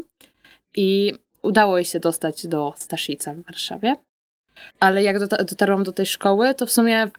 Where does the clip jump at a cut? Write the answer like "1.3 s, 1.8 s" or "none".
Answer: 4.7 s